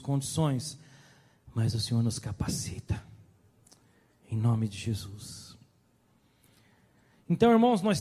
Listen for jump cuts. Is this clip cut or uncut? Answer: uncut